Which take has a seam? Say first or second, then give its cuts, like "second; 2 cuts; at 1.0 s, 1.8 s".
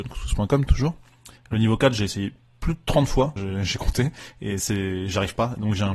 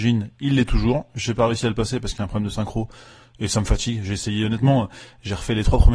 first; 2 cuts; at 1.4 s, 3.4 s